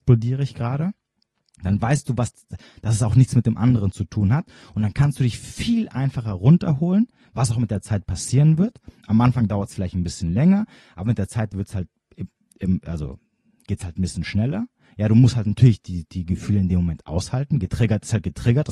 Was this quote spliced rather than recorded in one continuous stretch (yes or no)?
no